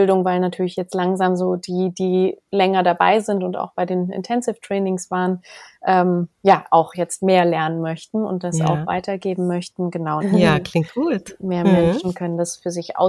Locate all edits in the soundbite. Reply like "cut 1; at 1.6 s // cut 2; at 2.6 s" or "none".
cut 1; at 10.2 s